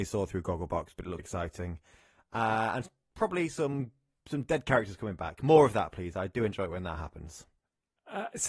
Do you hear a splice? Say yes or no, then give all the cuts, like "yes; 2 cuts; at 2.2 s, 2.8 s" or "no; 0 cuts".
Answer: yes; 1 cut; at 1.2 s